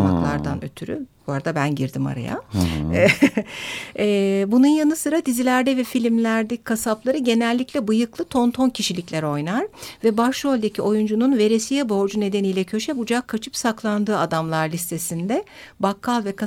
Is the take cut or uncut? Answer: uncut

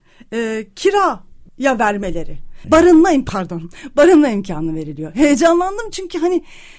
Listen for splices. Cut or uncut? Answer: cut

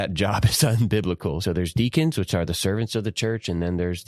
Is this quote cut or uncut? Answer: cut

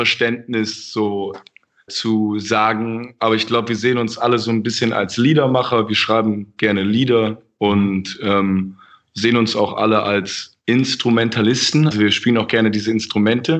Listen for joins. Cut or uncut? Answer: cut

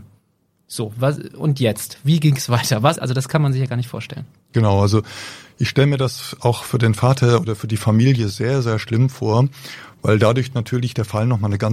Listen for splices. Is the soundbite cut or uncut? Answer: cut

